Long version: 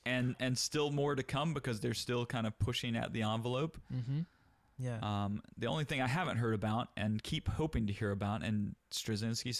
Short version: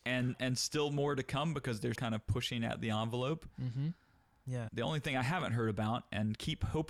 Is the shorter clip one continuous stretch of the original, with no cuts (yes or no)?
no